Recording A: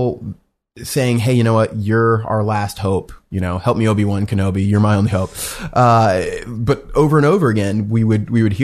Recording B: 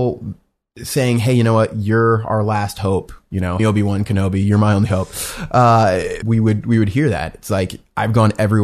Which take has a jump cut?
B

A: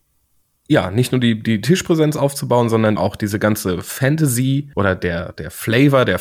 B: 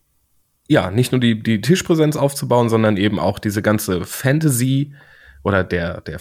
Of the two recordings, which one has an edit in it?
A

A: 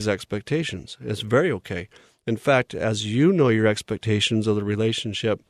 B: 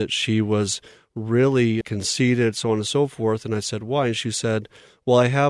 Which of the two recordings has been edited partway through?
B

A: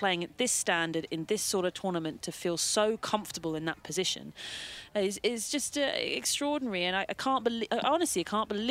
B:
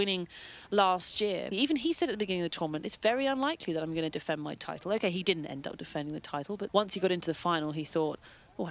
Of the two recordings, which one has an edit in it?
B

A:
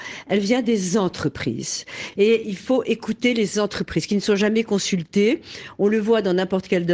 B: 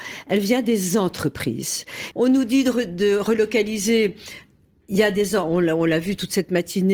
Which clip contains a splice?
B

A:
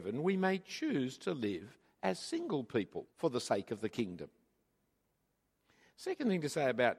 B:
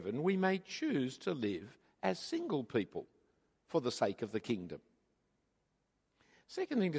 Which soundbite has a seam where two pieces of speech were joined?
A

